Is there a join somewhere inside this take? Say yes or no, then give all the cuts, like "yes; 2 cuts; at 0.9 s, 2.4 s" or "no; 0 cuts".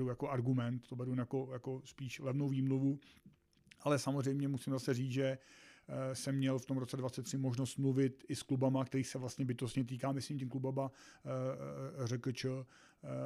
no; 0 cuts